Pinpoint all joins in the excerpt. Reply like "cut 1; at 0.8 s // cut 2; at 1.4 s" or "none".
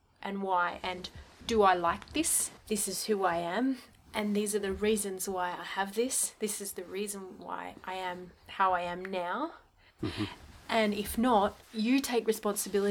cut 1; at 2.6 s // cut 2; at 10.0 s // cut 3; at 11.6 s